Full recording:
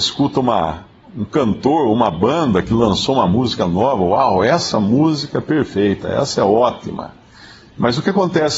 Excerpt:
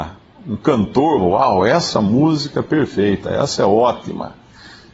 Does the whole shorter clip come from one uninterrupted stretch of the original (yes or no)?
no